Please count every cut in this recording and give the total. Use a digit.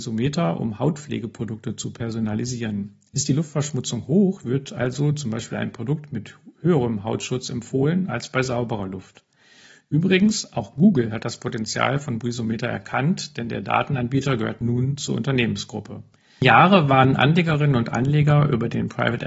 0